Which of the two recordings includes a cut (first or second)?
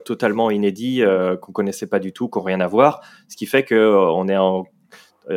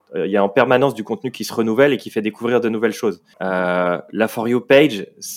second